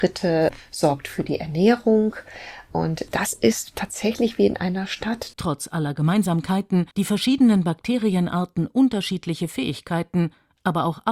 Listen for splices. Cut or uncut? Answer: cut